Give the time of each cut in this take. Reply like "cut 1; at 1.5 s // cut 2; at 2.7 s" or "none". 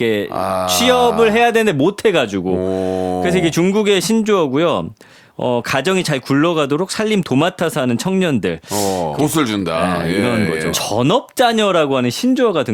cut 1; at 9.2 s // cut 2; at 10.7 s